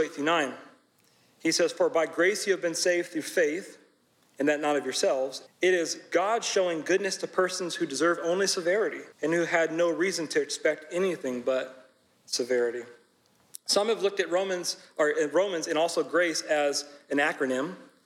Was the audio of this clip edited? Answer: yes; 2 cuts; at 5.5 s, 9.1 s

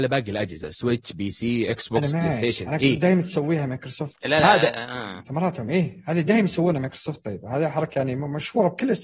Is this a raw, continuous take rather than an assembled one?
yes; 0 cuts

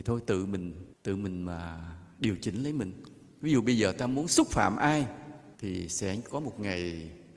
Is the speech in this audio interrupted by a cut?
yes; 2 cuts; at 0.9 s, 5.5 s

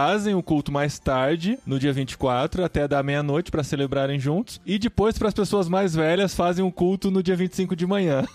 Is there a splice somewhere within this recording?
no; 0 cuts

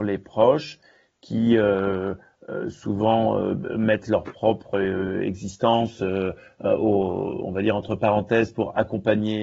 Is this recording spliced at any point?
no; 0 cuts

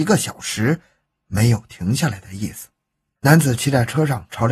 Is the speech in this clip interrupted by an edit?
yes; 1 cut; at 3.2 s

